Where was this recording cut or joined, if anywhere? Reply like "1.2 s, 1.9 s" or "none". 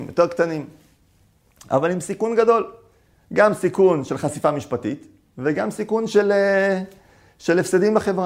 none

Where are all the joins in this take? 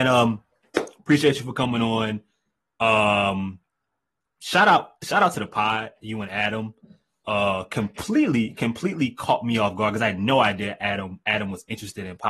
none

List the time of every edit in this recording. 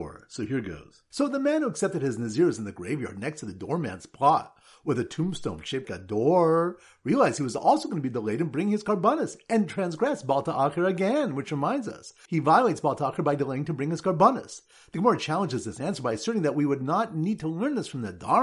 1.1 s, 5.8 s, 12.3 s

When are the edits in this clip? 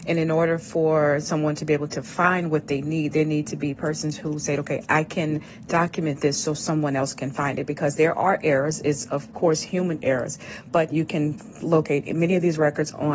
none

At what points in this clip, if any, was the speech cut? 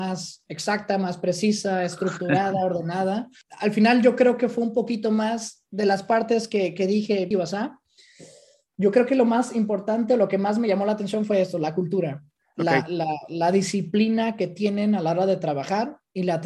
7.3 s

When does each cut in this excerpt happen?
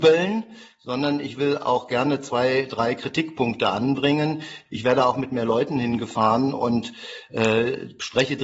4.7 s

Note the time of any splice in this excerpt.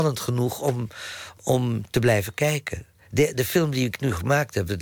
1.4 s

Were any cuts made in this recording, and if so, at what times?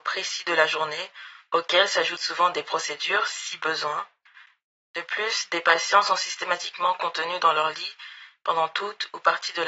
none

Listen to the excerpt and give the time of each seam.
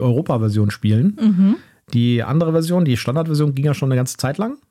none

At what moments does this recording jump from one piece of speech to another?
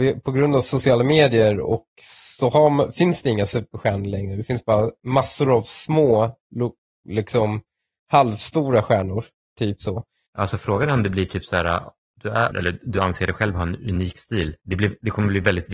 10.3 s, 12.5 s

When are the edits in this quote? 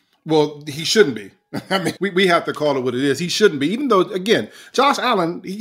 2.0 s

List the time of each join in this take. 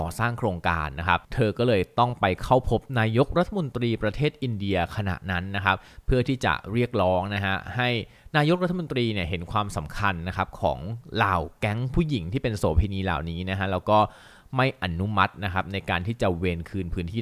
1.3 s

